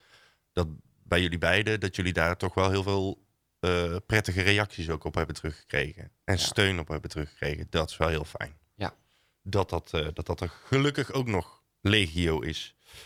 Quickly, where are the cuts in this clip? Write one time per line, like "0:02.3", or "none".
none